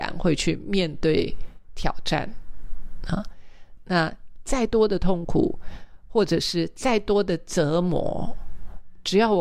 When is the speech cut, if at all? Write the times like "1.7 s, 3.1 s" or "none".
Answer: 3.8 s